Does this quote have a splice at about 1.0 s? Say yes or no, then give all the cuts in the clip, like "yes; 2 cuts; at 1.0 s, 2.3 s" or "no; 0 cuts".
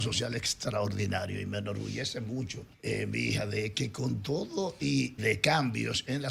no; 2 cuts; at 2.7 s, 5.2 s